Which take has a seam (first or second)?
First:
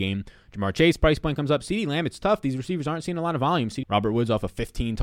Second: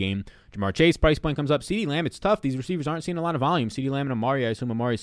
first